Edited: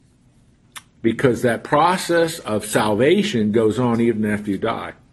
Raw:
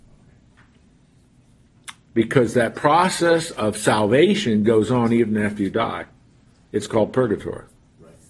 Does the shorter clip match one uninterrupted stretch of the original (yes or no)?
yes